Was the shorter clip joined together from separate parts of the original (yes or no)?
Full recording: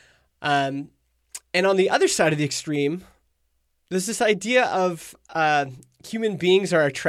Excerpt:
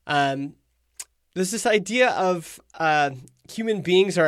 yes